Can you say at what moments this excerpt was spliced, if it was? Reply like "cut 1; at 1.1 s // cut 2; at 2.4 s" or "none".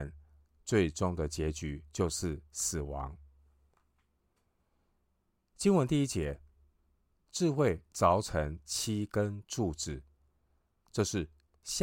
none